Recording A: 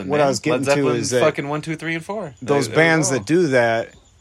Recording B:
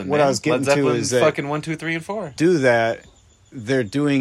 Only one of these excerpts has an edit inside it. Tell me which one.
B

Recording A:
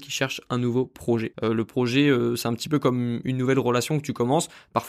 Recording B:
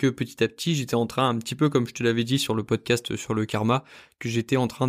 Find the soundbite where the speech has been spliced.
A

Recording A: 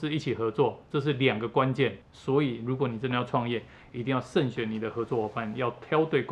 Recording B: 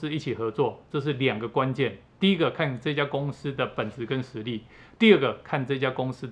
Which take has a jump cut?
A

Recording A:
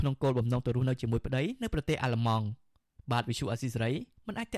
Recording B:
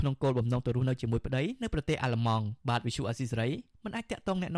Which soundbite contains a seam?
B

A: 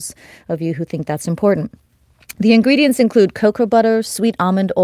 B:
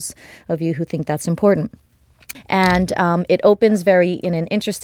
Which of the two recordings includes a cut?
B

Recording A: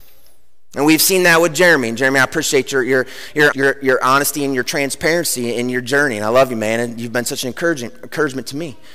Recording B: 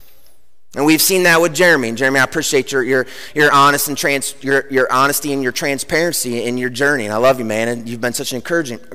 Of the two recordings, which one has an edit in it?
A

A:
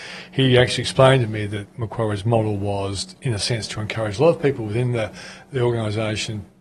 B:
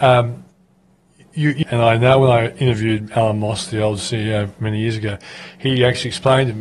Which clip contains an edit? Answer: B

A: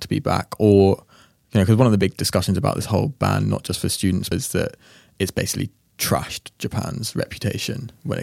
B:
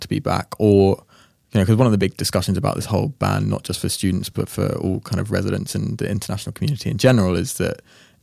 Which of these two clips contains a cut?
A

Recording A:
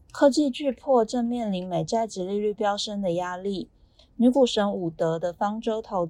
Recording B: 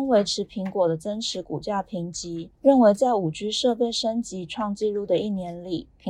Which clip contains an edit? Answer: B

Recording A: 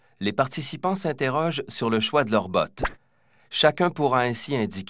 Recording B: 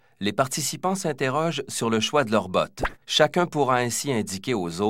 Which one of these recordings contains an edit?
B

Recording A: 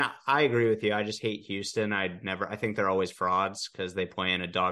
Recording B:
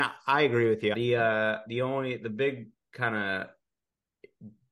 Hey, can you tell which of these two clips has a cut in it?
B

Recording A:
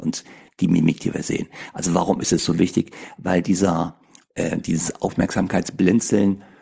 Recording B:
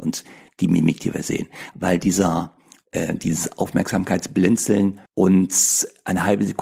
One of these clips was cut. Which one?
B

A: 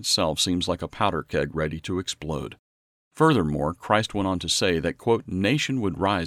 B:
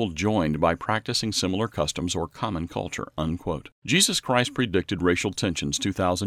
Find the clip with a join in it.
B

